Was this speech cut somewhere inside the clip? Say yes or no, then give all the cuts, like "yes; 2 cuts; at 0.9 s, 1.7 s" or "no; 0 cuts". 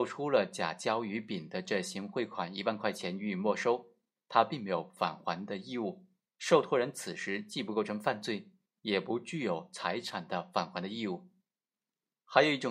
yes; 1 cut; at 6.3 s